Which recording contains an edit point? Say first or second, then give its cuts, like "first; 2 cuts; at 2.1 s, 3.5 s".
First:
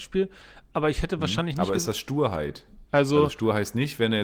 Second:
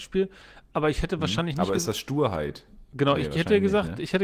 first; 1 cut; at 2.9 s